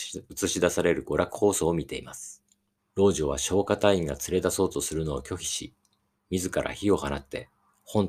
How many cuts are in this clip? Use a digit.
1